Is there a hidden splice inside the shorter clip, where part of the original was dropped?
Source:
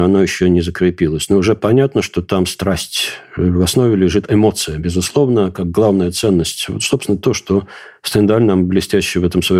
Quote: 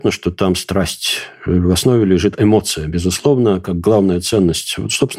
no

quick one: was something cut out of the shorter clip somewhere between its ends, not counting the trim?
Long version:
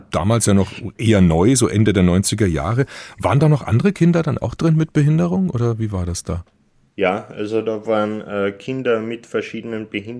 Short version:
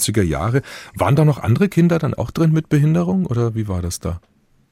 no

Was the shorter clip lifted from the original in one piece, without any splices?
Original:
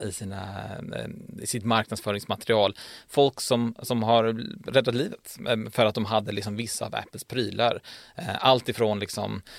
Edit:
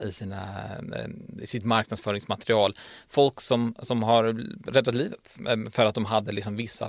yes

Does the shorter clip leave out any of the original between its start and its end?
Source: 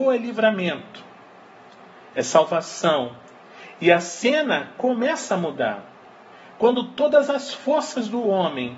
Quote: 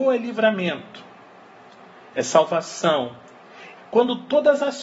yes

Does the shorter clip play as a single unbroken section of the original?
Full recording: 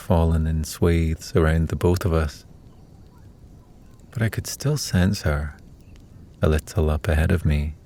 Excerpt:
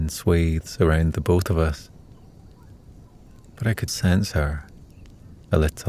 no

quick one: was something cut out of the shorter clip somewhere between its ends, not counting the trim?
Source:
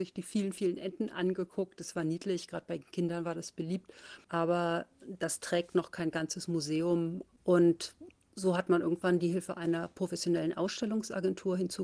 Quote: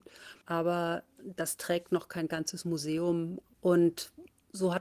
no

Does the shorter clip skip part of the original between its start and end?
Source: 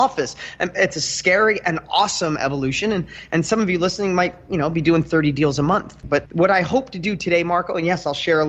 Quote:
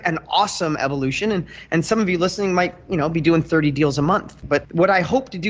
no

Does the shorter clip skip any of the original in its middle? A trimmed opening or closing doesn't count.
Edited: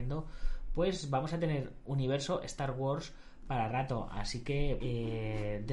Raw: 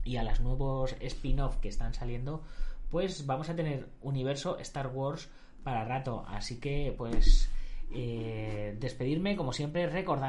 yes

